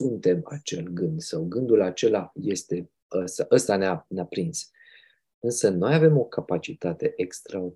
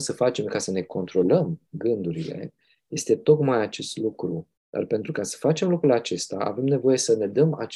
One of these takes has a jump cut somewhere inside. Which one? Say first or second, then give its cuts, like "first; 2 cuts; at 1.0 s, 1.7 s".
second; 1 cut; at 4.6 s